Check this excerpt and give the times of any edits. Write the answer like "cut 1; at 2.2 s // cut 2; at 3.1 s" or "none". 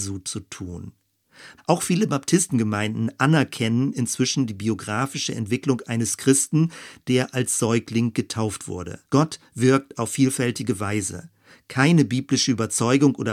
cut 1; at 1.6 s // cut 2; at 9.0 s